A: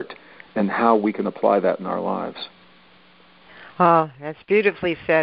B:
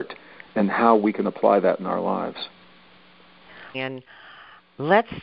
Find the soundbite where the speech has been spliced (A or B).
B